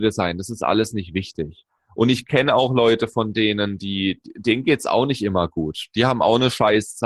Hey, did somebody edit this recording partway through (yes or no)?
no